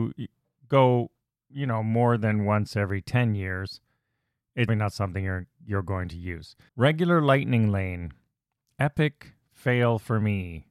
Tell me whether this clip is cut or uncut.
cut